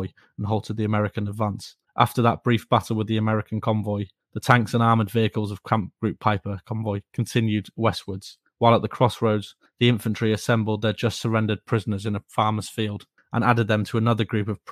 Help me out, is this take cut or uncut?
cut